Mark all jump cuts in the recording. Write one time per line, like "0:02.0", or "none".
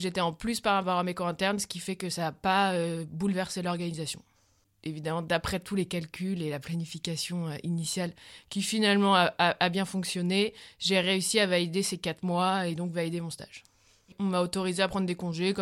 0:04.6